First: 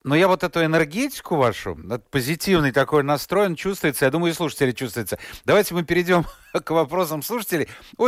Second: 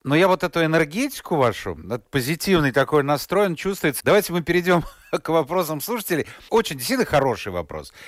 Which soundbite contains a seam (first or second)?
second